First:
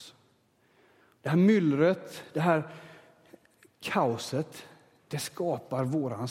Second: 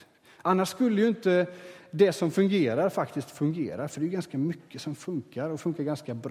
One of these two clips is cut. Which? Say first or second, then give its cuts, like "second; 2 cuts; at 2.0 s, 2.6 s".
first; 1 cut; at 5.1 s